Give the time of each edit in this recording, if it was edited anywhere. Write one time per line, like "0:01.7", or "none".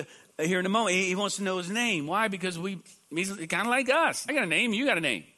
0:04.3